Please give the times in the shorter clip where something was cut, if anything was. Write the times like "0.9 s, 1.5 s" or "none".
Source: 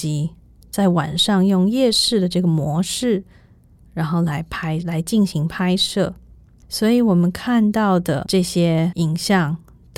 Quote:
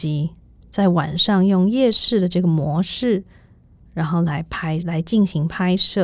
none